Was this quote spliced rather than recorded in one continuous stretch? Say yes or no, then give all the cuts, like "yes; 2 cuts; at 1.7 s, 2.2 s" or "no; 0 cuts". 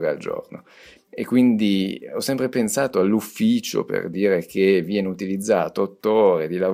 yes; 1 cut; at 1.0 s